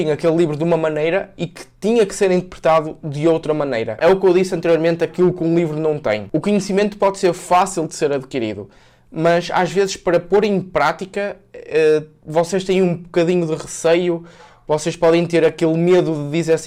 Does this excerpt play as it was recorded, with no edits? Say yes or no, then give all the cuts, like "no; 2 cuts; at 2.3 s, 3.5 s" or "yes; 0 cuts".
no; 1 cut; at 4.0 s